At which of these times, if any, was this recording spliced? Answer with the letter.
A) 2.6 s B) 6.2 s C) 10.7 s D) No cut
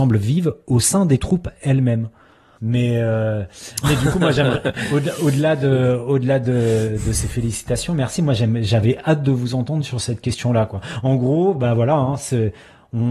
A